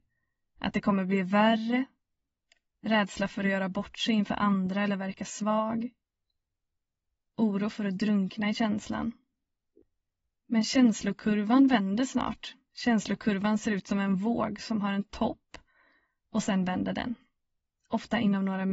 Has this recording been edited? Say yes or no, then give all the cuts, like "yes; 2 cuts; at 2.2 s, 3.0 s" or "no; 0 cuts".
no; 0 cuts